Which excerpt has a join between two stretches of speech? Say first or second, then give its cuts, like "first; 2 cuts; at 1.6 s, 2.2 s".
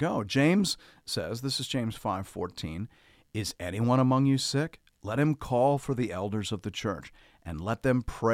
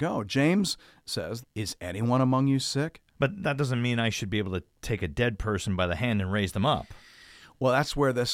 second; 2 cuts; at 1.4 s, 3.1 s